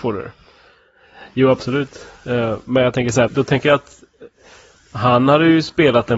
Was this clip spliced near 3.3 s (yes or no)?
yes